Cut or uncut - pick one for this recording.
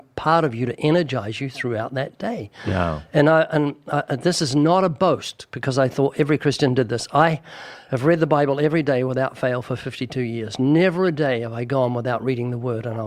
uncut